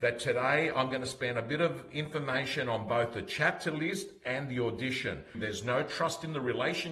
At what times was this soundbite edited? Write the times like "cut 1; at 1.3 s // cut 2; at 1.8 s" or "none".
cut 1; at 5.3 s